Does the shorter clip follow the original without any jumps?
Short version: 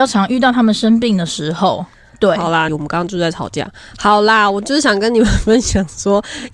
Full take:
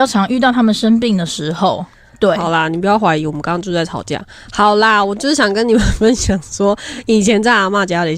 no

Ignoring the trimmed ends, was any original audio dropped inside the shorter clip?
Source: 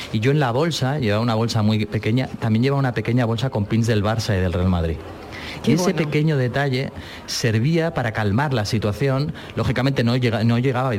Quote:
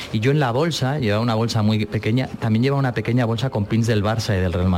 no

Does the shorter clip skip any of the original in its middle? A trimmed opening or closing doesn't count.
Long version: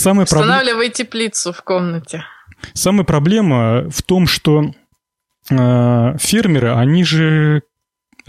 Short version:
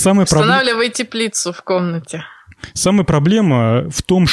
no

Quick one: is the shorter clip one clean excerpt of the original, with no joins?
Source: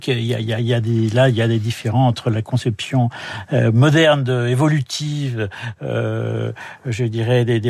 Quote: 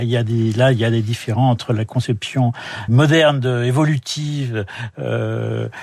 no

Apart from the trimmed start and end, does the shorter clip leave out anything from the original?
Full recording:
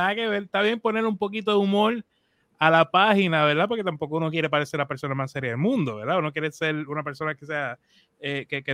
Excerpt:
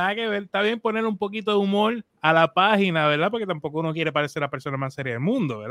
yes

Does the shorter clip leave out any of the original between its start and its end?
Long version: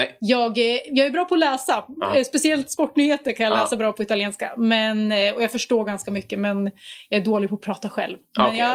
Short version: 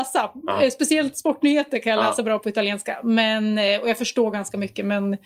no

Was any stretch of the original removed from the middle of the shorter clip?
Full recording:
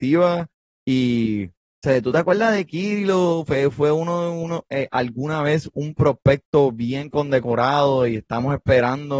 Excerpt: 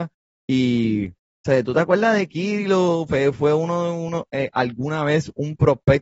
no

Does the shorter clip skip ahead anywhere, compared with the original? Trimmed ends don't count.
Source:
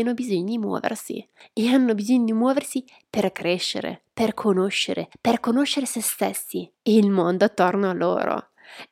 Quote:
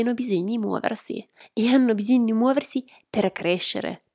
no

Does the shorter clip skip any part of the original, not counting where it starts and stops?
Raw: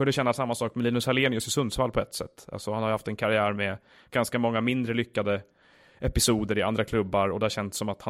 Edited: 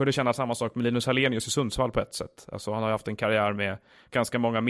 no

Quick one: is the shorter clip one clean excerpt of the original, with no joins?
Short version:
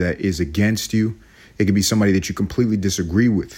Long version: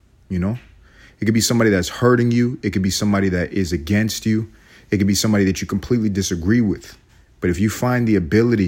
yes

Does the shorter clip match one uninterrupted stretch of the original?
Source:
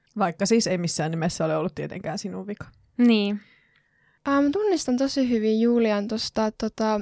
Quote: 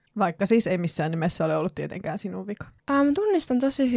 no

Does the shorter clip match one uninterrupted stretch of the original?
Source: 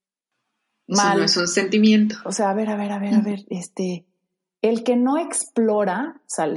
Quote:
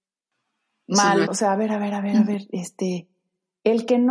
no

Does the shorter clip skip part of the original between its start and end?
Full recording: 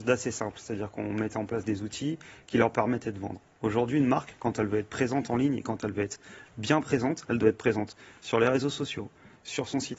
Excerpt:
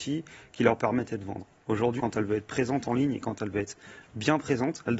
yes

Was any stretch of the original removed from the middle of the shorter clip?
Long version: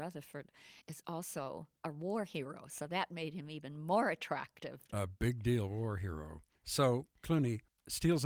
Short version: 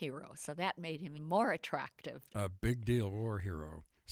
yes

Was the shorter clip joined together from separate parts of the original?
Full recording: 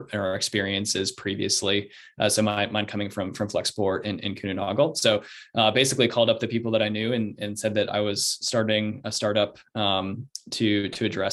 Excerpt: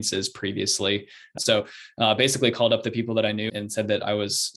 yes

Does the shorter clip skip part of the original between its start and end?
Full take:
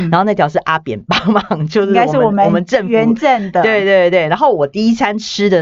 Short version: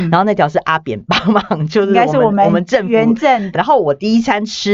yes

